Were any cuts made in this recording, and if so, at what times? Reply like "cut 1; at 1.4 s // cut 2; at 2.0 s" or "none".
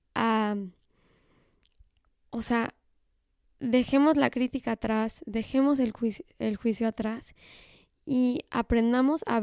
none